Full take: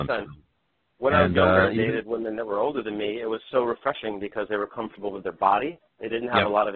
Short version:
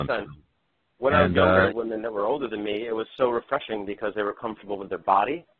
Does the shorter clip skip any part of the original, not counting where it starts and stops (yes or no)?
yes